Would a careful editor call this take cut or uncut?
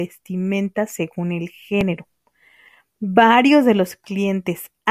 uncut